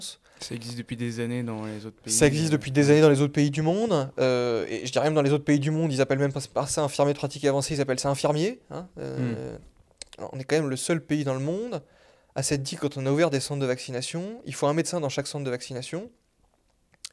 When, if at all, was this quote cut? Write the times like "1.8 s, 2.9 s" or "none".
10.2 s